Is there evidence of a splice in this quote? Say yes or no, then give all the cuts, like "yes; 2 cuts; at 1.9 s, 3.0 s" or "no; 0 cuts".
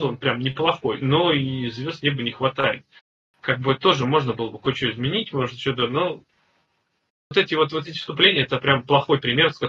no; 0 cuts